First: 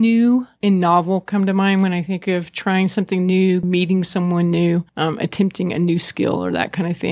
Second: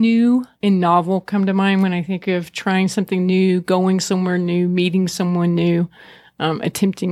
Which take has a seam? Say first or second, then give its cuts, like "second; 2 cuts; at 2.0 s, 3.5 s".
first; 2 cuts; at 3.6 s, 4.9 s